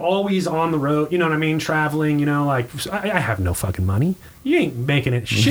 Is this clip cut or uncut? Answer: uncut